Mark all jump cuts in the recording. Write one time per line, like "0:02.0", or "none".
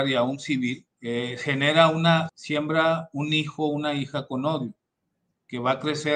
0:00.9
0:02.3